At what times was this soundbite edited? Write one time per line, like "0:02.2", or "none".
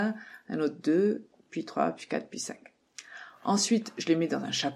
none